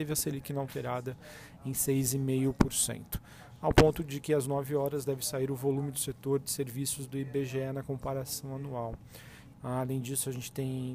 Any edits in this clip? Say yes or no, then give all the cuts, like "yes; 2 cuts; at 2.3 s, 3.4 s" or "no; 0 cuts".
yes; 1 cut; at 9.5 s